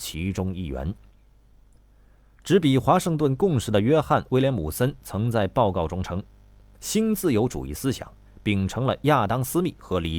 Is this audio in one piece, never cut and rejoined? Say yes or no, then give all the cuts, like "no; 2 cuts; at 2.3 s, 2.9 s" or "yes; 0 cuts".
yes; 0 cuts